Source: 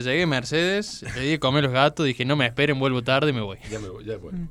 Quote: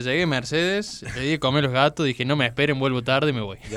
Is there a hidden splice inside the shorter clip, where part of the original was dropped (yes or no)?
no